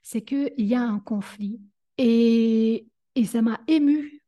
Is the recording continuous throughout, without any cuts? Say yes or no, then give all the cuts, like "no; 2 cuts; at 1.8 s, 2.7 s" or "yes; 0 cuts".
no; 1 cut; at 1.8 s